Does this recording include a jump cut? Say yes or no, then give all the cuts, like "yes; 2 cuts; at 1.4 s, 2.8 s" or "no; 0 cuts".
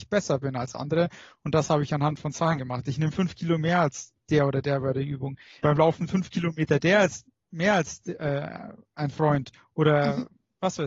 yes; 1 cut; at 5.6 s